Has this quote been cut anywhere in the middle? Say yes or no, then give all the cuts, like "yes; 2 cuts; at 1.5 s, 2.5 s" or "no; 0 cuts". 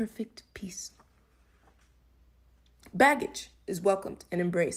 no; 0 cuts